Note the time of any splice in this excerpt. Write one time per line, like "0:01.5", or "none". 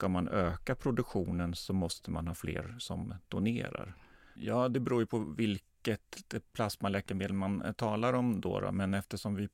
0:04.4

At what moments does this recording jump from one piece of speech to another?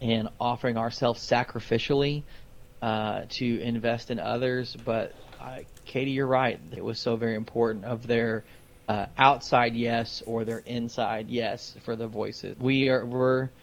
0:06.8
0:12.5

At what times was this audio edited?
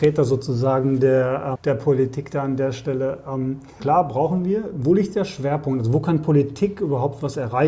0:01.5
0:03.8

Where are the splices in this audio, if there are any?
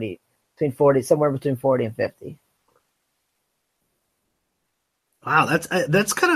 none

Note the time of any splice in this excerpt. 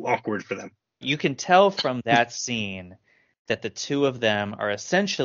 0:01.0

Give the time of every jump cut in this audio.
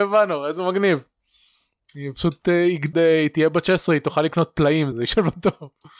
0:02.9
0:04.9

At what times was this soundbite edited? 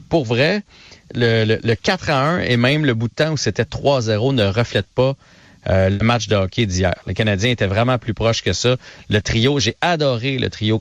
none

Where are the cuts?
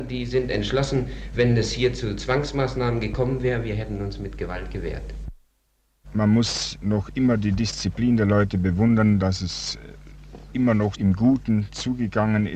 0:06.0
0:10.9

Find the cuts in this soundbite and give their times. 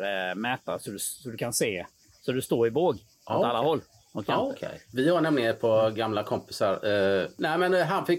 none

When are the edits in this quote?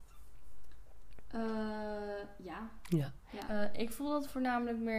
0:03.5

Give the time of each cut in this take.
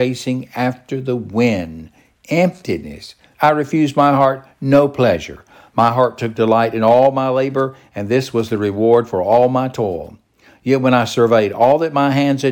0:03.3

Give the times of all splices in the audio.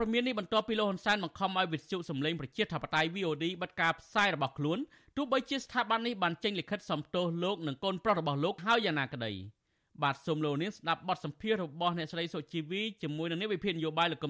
none

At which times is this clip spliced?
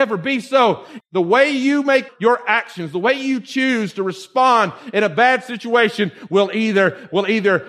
0:01.0
0:02.1

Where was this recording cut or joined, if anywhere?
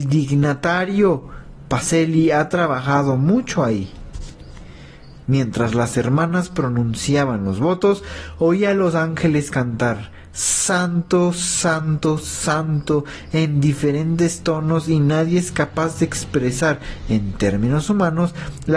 0:05.2

